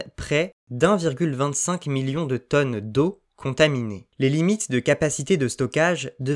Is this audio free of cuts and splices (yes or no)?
yes